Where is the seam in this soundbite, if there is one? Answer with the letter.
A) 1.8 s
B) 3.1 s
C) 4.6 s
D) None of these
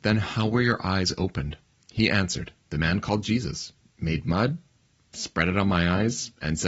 D